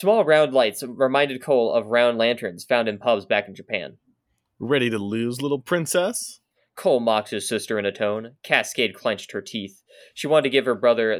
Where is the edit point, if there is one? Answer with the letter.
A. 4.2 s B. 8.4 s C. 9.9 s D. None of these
D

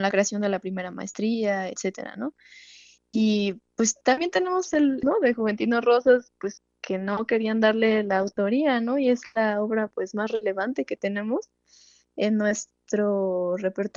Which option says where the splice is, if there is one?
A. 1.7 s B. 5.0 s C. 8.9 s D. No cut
B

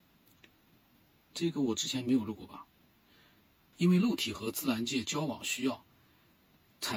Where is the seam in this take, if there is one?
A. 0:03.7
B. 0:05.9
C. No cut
A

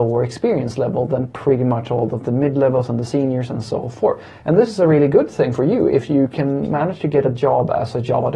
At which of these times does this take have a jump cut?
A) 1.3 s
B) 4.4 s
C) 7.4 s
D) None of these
D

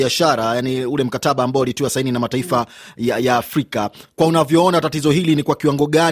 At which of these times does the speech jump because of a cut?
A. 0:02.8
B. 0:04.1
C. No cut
C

